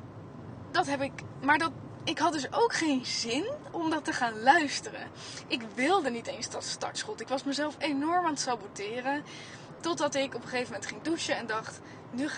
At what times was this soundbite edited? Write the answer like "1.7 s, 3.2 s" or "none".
none